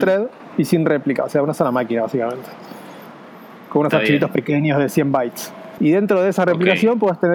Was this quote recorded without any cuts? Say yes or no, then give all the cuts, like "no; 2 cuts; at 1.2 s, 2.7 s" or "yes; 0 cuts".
no; 1 cut; at 5.8 s